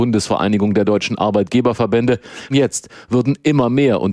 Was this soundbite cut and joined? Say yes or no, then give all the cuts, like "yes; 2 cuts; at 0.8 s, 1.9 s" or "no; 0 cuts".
yes; 1 cut; at 2.5 s